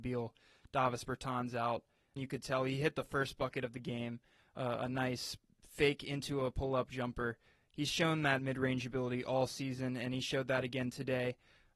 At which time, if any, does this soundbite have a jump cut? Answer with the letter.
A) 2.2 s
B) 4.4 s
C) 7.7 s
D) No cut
A